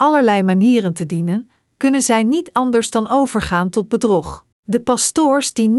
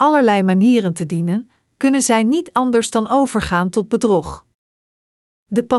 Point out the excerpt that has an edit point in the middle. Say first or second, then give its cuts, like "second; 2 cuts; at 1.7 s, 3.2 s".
first; 1 cut; at 4.5 s